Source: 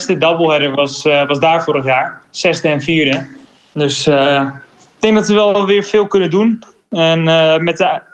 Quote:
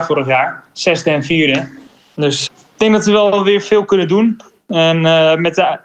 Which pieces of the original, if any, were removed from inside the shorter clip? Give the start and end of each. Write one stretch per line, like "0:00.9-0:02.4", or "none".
0:04.0-0:04.7